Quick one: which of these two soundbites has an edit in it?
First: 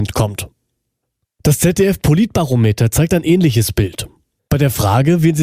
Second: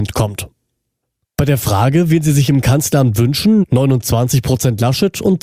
second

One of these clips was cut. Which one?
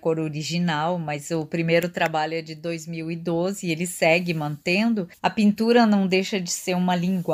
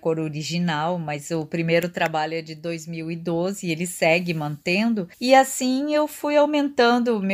first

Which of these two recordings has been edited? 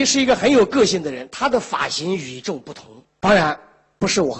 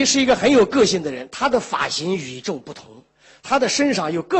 first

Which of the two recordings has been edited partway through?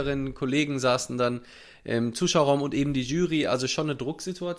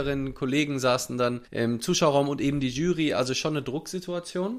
second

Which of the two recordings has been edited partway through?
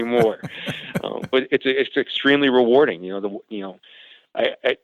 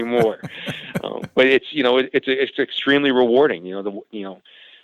first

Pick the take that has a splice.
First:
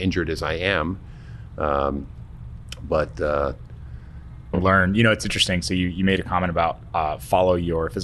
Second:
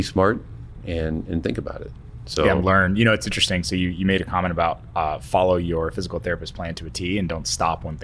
first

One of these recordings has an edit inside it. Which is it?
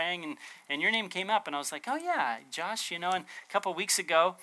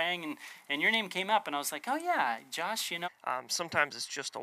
second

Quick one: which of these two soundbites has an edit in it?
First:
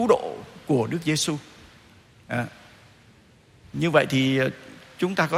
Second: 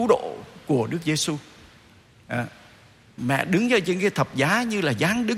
second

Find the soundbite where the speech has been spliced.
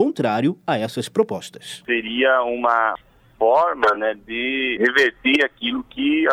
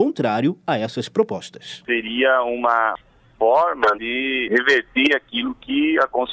second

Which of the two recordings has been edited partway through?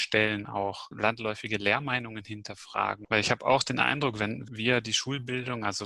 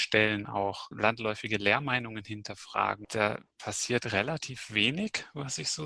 first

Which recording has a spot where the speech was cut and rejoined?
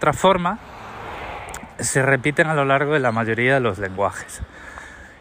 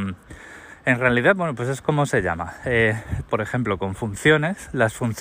second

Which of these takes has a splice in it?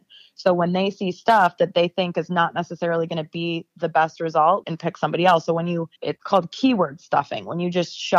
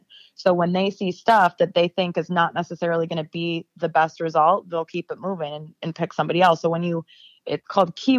first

